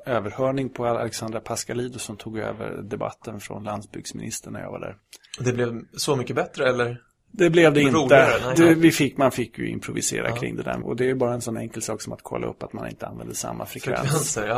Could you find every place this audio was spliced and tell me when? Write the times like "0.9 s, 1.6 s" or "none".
8.6 s, 10.8 s